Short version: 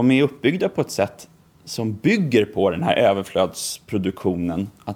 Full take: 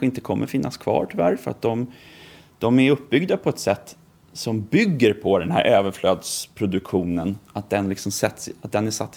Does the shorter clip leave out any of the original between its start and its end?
no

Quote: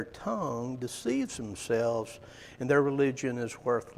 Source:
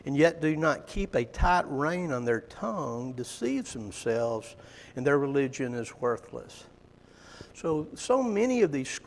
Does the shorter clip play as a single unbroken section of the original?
yes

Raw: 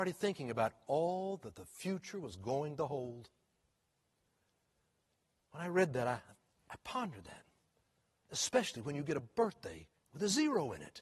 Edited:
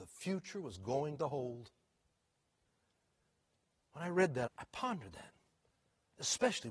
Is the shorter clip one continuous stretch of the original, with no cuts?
no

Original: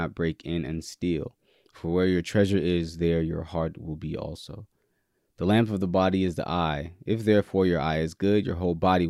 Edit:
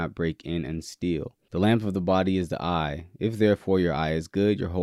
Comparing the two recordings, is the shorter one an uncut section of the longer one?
no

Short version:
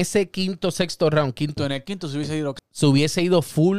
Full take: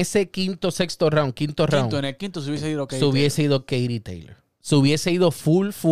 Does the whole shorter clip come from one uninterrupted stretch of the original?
no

